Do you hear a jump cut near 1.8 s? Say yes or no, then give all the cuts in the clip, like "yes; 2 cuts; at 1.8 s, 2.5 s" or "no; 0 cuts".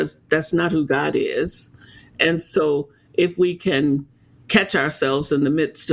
no; 0 cuts